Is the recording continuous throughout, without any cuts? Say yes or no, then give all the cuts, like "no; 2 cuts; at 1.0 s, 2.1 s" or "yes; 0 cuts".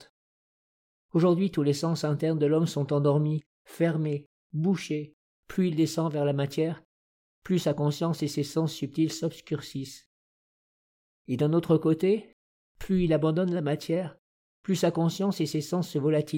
no; 1 cut; at 5.3 s